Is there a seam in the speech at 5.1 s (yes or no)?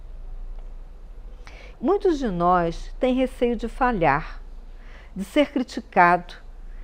no